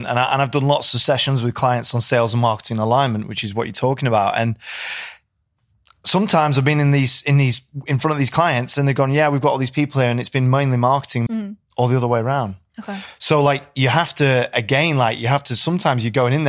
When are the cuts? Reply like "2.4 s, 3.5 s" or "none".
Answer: 11.3 s